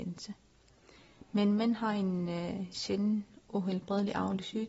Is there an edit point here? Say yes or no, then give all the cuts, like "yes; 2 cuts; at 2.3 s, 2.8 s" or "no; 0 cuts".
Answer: no; 0 cuts